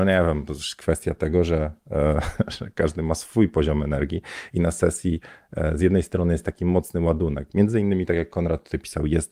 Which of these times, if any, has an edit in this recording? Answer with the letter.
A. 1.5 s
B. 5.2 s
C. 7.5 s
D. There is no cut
D